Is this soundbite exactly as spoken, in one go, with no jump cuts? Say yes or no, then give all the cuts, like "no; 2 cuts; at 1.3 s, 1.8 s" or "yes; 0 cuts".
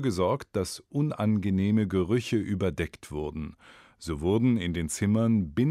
yes; 0 cuts